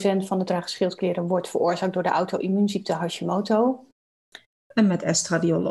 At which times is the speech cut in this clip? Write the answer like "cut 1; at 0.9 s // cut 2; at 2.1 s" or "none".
cut 1; at 4.5 s